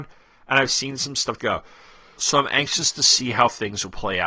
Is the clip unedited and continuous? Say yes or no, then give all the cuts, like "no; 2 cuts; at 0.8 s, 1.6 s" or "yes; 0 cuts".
no; 1 cut; at 1.4 s